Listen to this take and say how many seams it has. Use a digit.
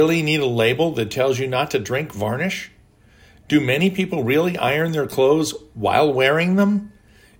0